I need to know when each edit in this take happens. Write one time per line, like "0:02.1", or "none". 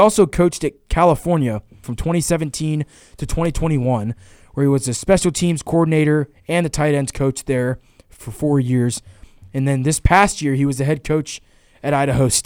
0:01.8